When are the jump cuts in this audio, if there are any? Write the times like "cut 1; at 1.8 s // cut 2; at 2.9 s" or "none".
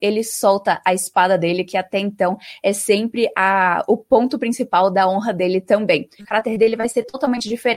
cut 1; at 6.2 s